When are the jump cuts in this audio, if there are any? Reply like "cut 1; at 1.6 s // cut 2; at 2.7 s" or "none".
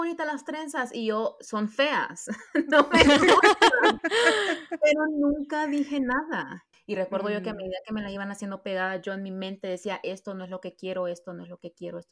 cut 1; at 6.7 s